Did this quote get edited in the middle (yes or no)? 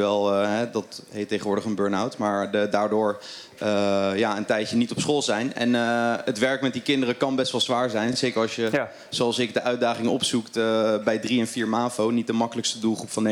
no